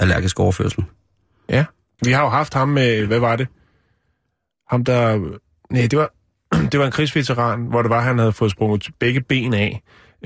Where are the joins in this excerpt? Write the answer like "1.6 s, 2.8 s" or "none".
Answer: 2.0 s